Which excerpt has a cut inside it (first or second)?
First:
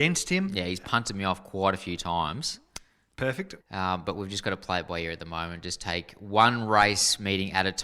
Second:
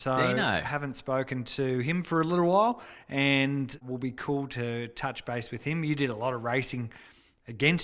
first